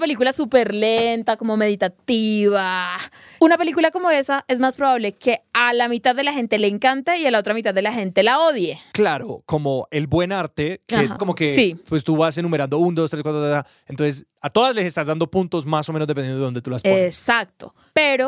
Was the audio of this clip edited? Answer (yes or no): yes